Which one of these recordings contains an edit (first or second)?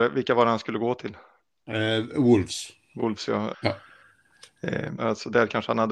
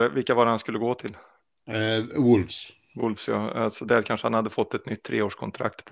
first